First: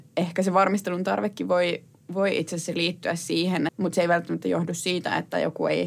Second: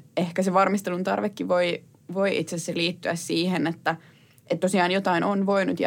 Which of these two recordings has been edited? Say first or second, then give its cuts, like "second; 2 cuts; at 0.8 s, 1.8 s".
first; 1 cut; at 3.7 s